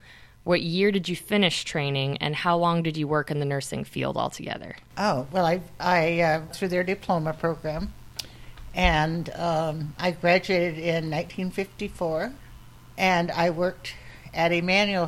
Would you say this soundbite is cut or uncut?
cut